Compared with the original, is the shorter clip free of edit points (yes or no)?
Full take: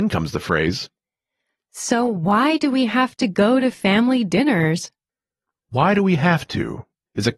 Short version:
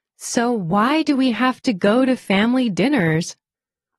yes